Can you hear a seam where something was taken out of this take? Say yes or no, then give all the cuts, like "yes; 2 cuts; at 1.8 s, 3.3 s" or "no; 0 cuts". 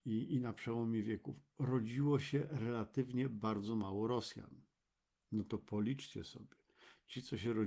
no; 0 cuts